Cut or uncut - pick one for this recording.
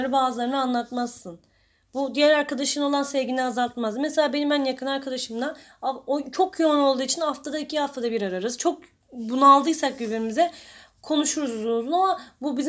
uncut